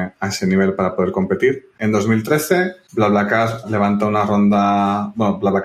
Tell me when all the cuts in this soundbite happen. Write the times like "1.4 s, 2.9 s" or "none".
1.7 s